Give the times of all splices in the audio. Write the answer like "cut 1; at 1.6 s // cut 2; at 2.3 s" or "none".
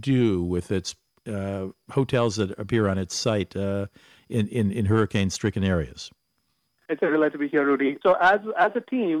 cut 1; at 6.8 s // cut 2; at 8.0 s